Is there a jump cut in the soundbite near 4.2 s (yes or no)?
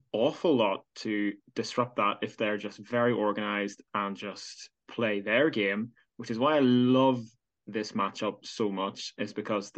no